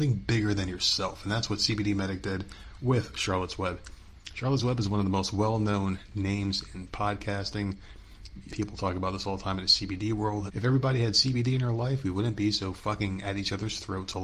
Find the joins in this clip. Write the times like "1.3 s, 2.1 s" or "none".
8.5 s, 10.5 s

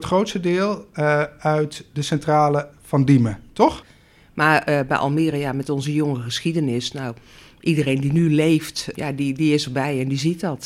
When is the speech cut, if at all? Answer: 3.8 s, 8.9 s

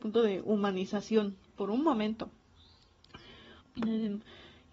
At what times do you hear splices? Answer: 3.6 s

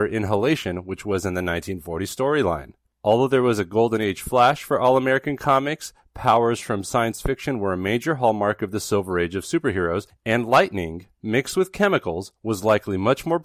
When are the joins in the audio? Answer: 2.9 s

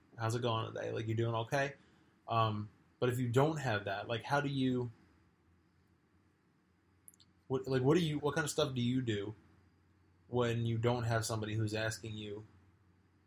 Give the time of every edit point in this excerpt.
8.2 s

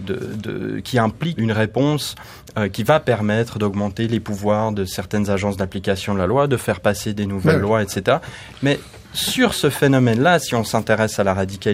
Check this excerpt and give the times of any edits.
1.4 s

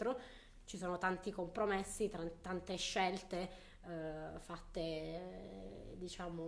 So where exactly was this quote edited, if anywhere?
none

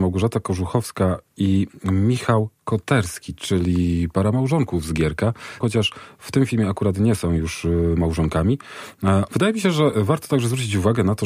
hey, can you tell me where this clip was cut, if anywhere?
5.6 s, 9.3 s

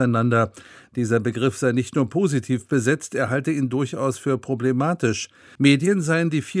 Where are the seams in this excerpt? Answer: 5.6 s

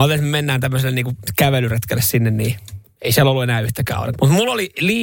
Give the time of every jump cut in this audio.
4.1 s

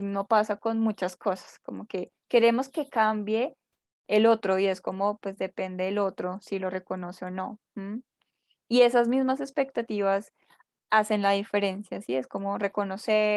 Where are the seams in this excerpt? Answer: none

